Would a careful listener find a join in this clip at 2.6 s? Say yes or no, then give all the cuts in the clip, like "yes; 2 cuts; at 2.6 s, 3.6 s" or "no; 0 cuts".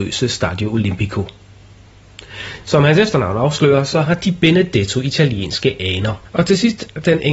yes; 2 cuts; at 2.6 s, 6.2 s